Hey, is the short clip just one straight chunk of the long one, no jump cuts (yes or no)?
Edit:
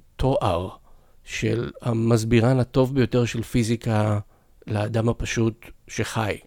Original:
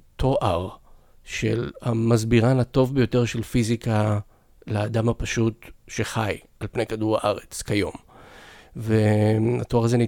yes